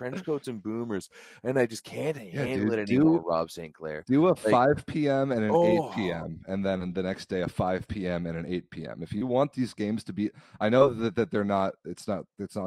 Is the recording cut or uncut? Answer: uncut